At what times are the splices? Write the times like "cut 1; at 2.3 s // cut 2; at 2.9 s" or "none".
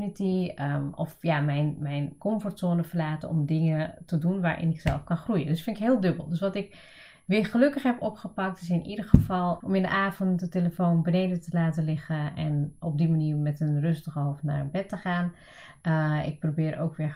cut 1; at 2.2 s // cut 2; at 9.6 s